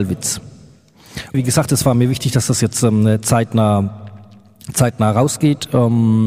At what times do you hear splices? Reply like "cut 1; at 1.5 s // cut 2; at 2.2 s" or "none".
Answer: cut 1; at 1.3 s